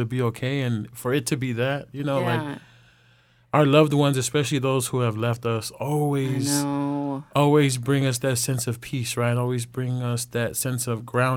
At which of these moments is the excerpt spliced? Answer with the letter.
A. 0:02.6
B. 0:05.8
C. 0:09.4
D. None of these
D